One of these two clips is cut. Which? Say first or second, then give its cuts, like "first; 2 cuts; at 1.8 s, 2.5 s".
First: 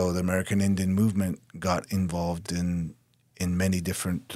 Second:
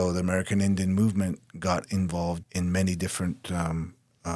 second; 1 cut; at 2.4 s